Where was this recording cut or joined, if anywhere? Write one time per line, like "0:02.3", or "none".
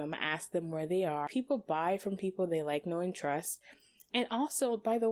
0:01.3